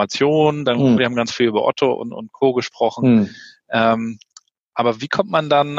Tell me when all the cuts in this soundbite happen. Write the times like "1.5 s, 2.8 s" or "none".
1.0 s